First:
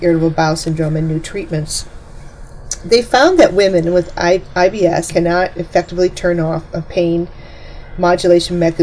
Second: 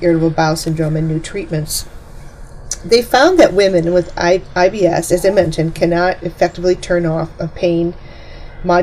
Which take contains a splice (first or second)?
first